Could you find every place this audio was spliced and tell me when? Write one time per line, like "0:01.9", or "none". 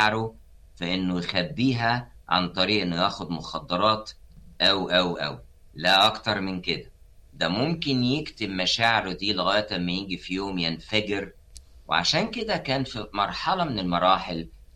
0:05.2